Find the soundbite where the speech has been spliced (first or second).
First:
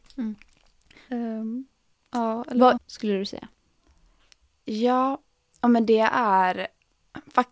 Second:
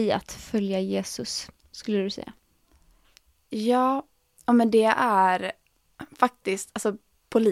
first